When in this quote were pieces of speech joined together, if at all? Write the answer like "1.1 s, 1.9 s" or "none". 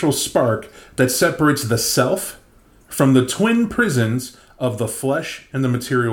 none